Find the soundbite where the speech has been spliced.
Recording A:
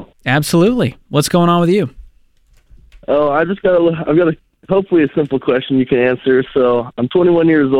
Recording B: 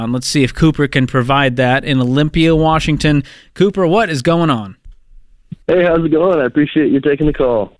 B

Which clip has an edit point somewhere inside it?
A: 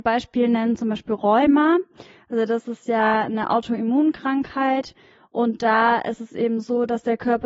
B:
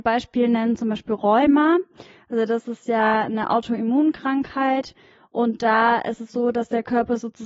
B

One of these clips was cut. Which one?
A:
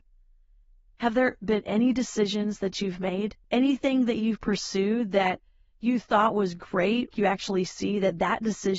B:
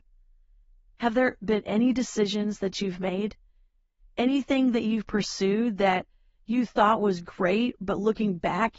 A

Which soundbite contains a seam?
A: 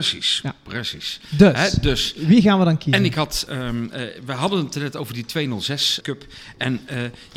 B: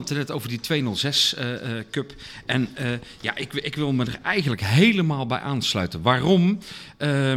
A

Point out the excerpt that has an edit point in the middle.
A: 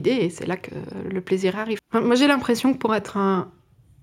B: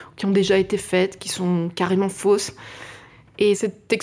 A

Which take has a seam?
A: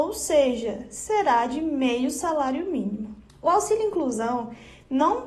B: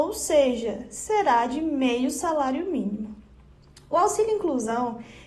A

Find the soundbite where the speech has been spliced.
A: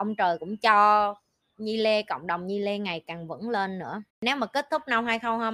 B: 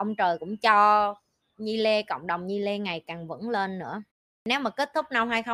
A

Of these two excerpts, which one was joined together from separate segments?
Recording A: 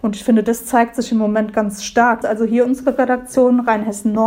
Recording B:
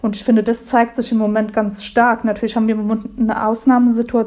A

